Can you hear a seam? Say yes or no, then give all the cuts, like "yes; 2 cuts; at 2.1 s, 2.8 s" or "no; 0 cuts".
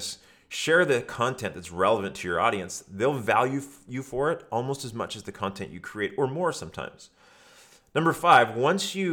no; 0 cuts